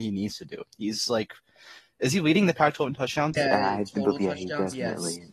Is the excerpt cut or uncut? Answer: cut